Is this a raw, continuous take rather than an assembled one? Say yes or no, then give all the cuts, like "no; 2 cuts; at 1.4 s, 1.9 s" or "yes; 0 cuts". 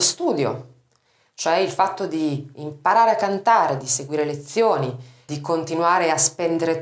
no; 1 cut; at 5.3 s